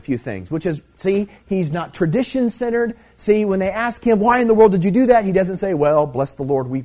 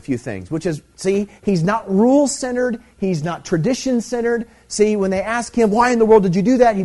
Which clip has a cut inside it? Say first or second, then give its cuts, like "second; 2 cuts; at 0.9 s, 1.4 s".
first; 1 cut; at 1.4 s